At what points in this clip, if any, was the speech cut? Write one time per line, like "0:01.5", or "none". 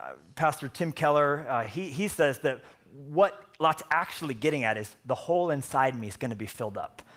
none